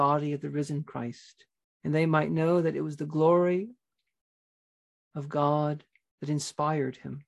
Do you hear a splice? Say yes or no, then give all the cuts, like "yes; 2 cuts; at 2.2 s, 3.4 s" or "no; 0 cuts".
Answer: yes; 1 cut; at 1.6 s